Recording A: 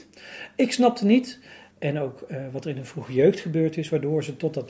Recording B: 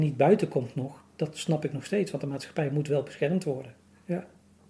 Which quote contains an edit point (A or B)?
A